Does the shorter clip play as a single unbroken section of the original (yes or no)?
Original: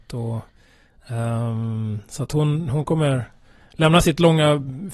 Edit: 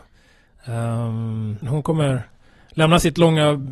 no